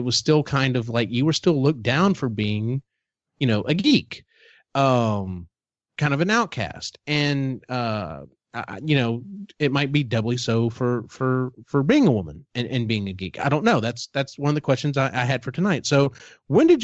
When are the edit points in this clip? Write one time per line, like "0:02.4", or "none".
none